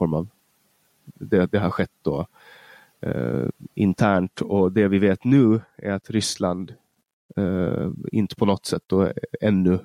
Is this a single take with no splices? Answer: yes; 0 cuts

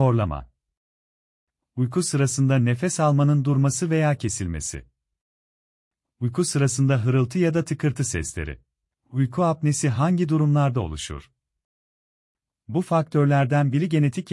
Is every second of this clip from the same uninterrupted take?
no; 2 cuts; at 8.9 s, 12.5 s

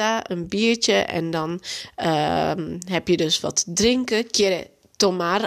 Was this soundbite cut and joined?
no; 0 cuts

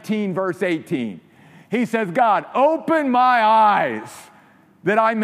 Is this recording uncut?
yes; 0 cuts

